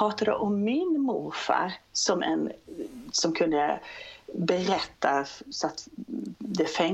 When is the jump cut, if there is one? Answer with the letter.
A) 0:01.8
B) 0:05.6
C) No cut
A